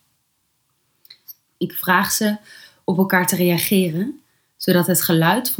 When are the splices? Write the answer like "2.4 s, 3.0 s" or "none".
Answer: 1.5 s